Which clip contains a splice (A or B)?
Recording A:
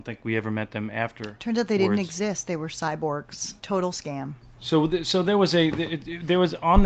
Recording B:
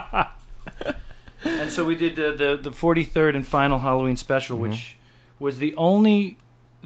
A